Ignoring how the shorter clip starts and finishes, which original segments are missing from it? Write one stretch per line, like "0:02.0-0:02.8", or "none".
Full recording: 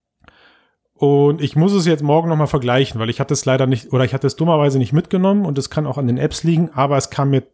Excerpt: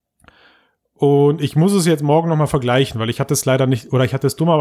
none

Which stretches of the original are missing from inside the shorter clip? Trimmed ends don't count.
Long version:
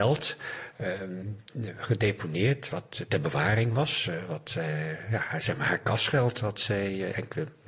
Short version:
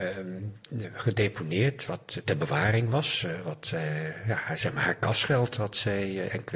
none

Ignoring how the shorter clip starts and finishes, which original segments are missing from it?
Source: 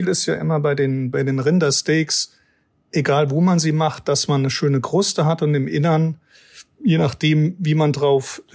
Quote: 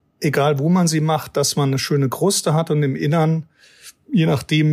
none

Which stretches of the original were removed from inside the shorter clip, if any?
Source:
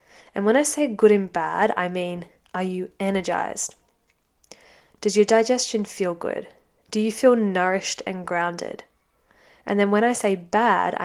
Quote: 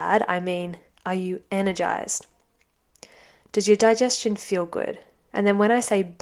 0:06.8-0:09.6

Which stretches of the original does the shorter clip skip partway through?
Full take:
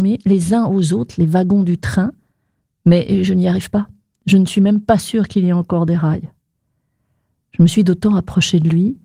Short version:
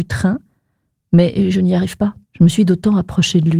0:04.0-0:07.4

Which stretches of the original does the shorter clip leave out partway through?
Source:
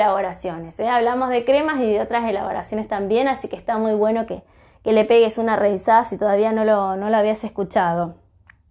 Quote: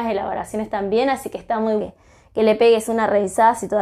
0:04.0-0:04.3

